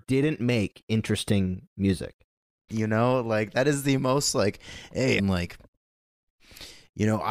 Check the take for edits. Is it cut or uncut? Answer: cut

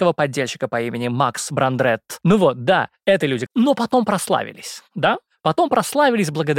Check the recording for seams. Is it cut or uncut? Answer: cut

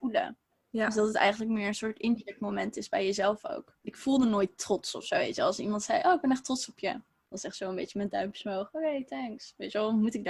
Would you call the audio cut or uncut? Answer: cut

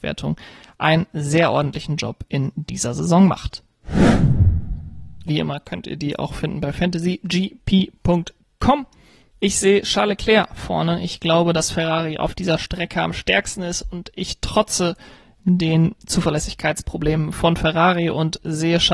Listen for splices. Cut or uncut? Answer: cut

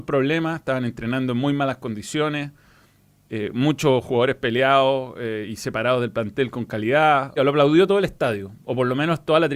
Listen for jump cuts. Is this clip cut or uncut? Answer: cut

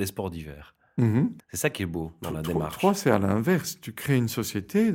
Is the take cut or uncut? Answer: cut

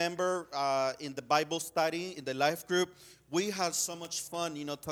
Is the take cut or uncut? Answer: uncut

